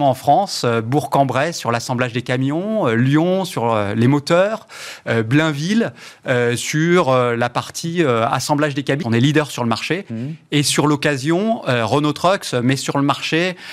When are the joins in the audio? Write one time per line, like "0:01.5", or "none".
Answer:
0:09.0